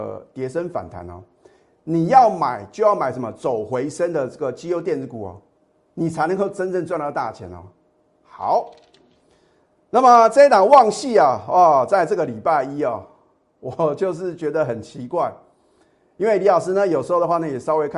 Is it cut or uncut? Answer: uncut